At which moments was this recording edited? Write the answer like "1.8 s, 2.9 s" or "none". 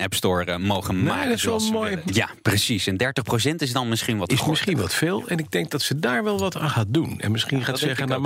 2.1 s